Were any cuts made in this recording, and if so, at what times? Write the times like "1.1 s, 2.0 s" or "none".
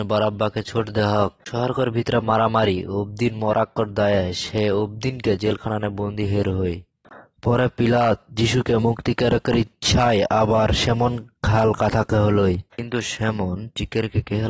1.4 s, 12.7 s